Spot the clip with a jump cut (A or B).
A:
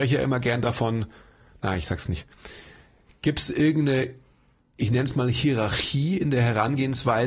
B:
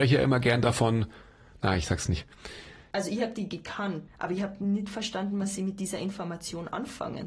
B